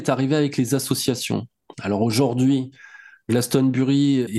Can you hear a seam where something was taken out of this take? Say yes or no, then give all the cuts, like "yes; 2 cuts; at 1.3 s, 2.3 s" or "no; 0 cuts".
no; 0 cuts